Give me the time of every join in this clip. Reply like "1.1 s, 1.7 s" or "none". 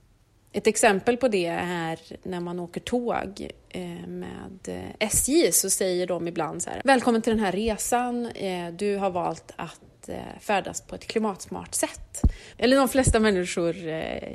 6.8 s, 12.5 s